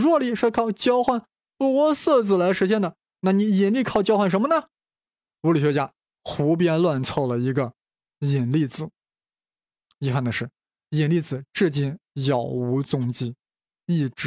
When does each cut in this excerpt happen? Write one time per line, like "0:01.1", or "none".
none